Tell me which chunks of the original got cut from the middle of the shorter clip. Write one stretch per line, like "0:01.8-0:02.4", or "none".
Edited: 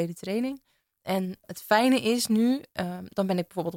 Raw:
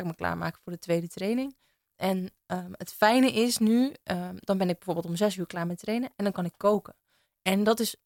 0:02.4-0:02.7